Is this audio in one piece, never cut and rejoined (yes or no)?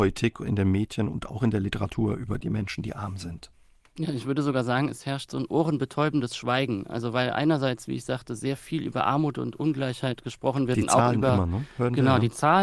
yes